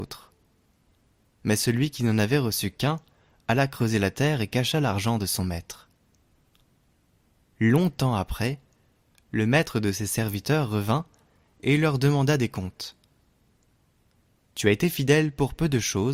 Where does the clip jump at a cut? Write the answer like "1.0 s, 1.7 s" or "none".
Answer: 14.3 s